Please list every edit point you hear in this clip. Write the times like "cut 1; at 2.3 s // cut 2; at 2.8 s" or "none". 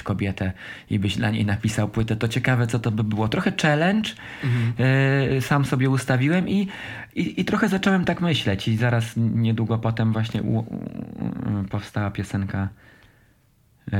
none